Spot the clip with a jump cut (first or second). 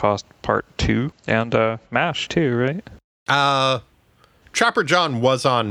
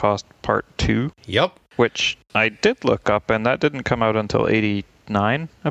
first